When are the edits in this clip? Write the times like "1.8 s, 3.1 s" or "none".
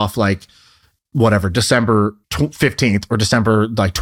1.0 s, 2.2 s